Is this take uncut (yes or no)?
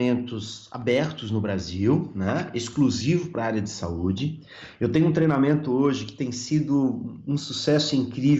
yes